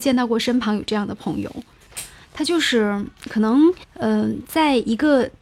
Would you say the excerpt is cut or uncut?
cut